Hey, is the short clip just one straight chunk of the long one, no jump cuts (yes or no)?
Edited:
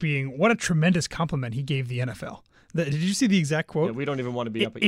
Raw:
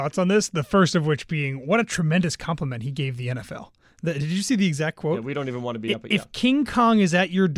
yes